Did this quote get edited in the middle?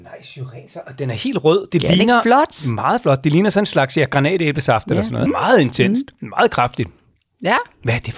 yes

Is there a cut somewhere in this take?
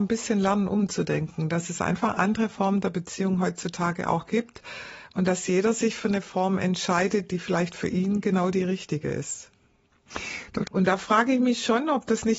yes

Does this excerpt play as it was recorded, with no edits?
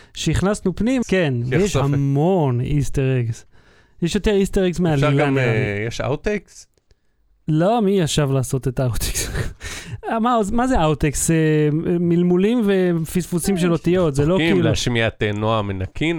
no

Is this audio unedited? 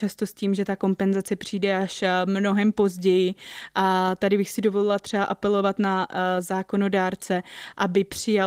yes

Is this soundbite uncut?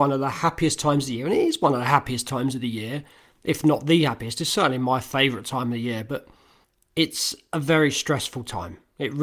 yes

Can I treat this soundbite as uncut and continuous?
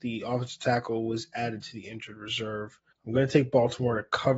no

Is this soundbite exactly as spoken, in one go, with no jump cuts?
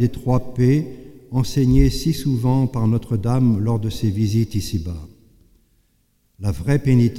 no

